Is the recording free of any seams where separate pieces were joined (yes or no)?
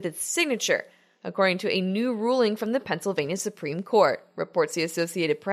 yes